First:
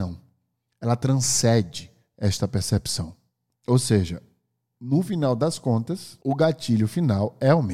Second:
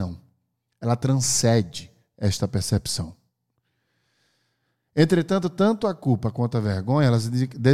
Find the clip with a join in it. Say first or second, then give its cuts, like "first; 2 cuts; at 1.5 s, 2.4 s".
first; 2 cuts; at 3.5 s, 6.2 s